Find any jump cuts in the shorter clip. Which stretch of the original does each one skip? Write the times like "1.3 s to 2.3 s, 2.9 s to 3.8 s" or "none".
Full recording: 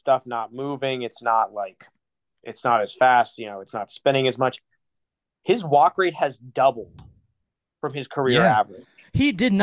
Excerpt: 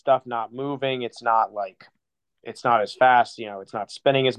none